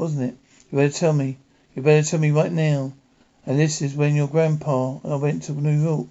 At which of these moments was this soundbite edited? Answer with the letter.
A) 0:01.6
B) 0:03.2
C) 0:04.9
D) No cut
D